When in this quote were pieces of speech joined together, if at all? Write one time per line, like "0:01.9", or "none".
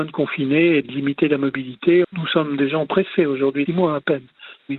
0:02.0
0:03.7